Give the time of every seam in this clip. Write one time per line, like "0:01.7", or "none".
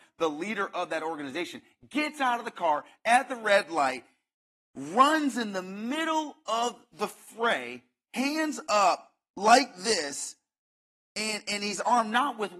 none